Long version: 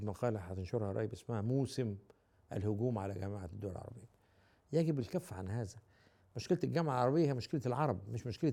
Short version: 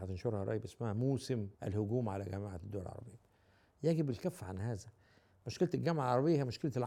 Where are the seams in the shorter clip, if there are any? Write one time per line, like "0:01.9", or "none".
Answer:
0:01.5